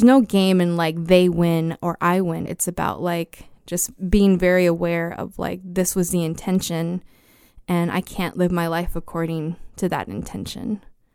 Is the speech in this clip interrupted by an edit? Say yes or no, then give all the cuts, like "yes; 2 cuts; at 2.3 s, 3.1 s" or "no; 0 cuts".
yes; 1 cut; at 2.5 s